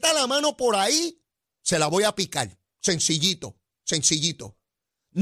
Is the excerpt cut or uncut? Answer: uncut